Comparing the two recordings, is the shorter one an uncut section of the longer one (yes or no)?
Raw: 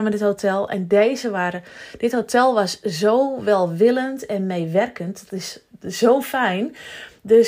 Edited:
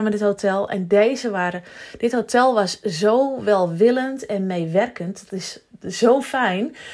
yes